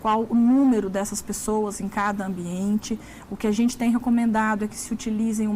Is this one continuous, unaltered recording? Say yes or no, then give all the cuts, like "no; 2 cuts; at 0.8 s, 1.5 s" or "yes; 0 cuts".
yes; 0 cuts